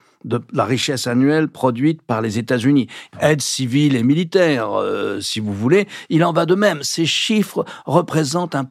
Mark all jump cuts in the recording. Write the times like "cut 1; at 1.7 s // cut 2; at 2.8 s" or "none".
cut 1; at 3.1 s